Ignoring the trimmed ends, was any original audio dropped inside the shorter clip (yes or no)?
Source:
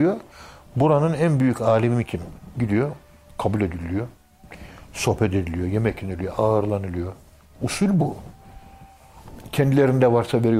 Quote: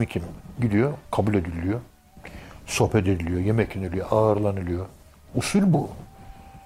yes